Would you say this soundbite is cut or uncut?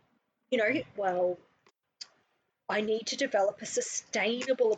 cut